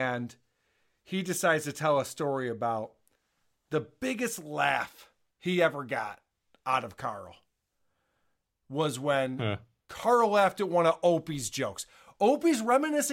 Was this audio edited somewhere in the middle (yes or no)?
no